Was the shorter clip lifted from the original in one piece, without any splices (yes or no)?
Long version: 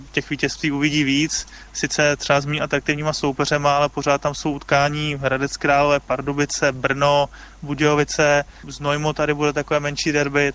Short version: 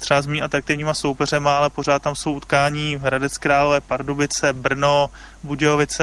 yes